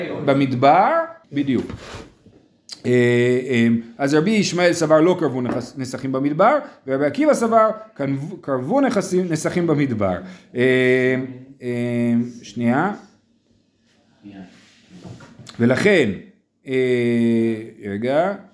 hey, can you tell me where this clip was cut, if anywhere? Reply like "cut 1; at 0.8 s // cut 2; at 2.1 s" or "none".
cut 1; at 1.2 s

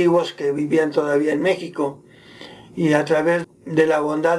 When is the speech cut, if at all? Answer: cut 1; at 3.4 s

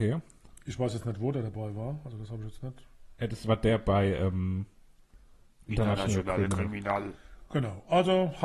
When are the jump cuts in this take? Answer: cut 1; at 5.7 s

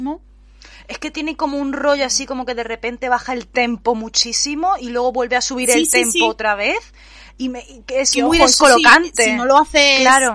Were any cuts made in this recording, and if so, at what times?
none

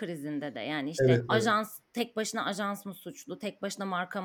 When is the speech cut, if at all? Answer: cut 1; at 1.2 s

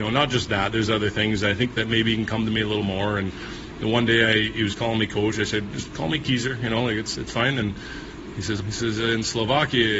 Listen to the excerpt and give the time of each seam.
cut 1; at 8.6 s

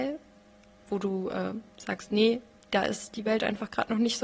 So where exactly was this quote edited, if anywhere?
none

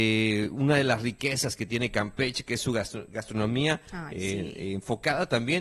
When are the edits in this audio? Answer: none

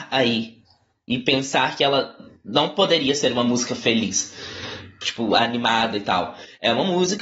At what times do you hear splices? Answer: none

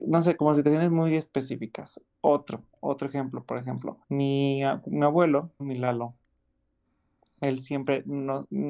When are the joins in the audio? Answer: cut 1; at 4.0 s // cut 2; at 5.6 s

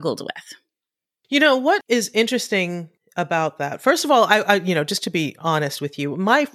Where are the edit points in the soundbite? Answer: none

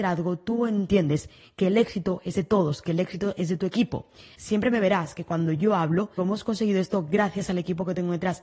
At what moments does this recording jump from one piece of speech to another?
cut 1; at 4.3 s // cut 2; at 6.2 s

